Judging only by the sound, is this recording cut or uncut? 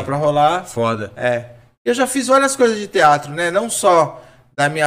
uncut